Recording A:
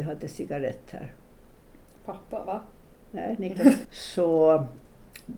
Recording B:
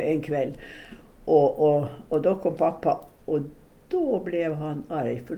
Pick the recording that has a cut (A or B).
A